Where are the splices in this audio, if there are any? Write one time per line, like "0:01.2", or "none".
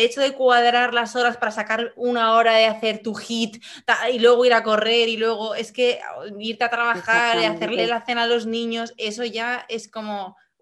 none